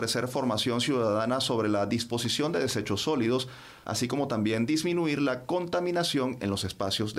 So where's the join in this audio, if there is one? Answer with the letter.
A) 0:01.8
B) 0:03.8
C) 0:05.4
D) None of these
B